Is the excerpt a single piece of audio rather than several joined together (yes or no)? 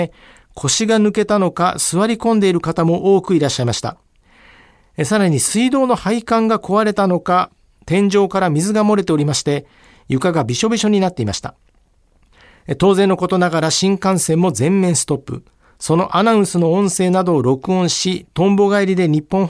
yes